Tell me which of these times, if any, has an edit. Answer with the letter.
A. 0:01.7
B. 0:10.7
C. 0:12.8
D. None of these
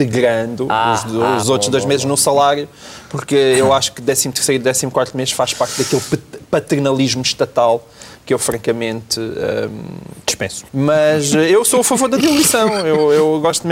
B